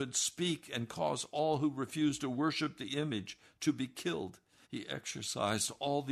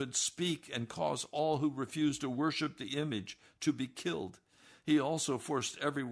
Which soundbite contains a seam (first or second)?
first